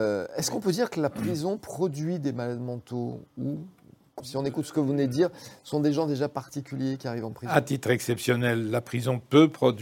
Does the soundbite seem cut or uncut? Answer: cut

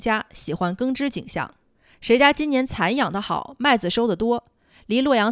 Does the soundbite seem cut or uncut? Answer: uncut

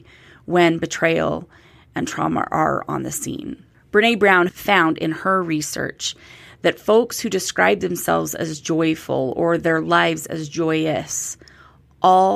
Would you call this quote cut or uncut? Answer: cut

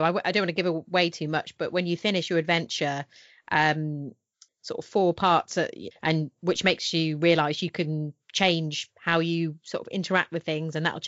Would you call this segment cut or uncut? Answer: cut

